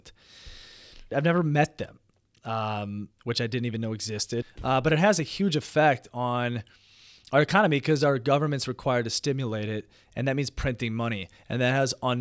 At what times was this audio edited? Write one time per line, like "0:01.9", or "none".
0:01.1
0:03.1
0:04.4